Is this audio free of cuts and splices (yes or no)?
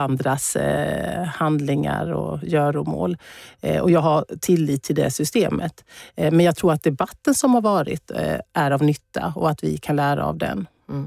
yes